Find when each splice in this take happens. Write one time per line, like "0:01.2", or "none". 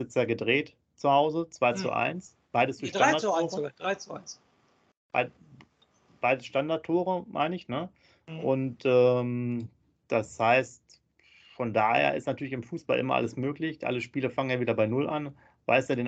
none